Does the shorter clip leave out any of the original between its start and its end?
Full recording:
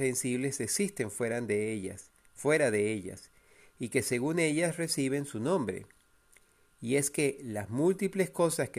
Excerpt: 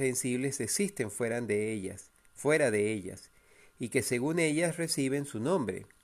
no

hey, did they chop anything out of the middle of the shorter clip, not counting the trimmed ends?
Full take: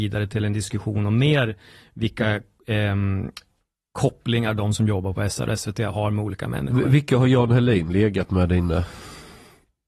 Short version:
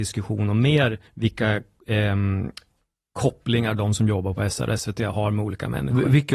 yes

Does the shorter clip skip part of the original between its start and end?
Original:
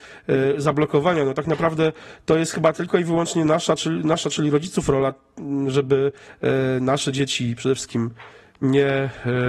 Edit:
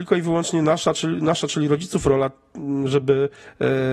no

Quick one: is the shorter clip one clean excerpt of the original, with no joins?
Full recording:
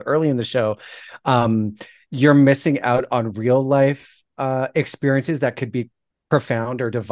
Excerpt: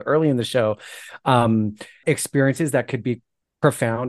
no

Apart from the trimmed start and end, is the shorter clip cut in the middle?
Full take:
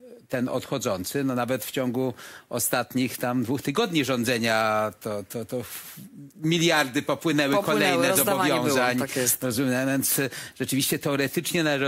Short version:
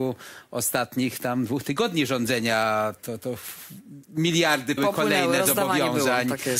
yes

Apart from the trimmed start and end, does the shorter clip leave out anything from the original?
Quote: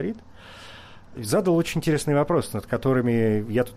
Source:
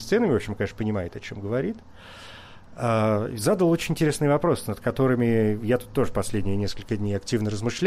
yes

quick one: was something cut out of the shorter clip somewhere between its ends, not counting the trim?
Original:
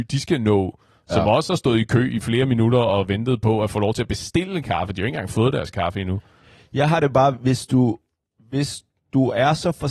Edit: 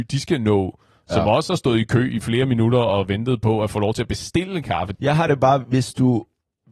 yes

